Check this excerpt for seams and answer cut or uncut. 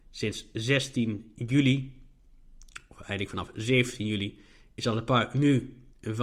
uncut